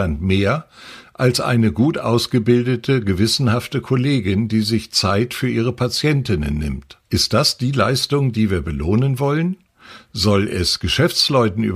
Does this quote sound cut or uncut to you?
cut